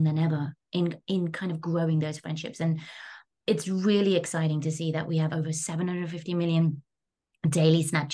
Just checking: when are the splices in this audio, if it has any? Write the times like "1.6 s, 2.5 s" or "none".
5.3 s